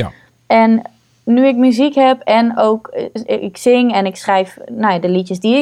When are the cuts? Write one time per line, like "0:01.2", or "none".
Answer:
none